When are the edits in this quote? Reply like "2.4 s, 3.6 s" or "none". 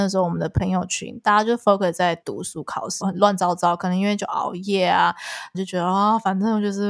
3.0 s, 5.5 s